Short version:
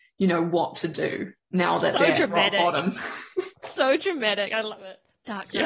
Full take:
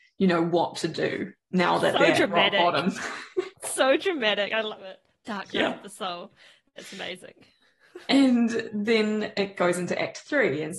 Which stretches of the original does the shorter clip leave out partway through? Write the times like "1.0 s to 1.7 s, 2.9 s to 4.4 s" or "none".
none